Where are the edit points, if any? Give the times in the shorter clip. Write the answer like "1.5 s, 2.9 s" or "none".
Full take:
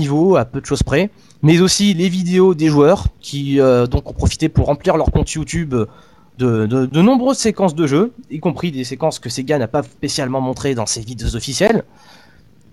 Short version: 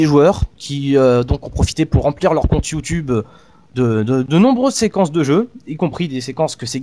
none